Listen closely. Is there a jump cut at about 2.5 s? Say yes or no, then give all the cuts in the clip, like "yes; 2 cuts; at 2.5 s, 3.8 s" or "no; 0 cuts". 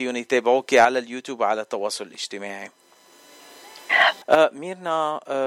no; 1 cut; at 4.2 s